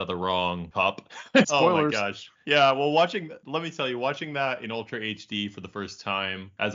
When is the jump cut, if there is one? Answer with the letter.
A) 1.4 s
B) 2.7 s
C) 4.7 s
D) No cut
A